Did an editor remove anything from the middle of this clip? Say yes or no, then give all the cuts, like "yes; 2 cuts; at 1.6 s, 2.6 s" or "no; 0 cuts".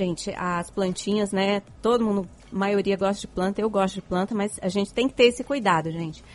no; 0 cuts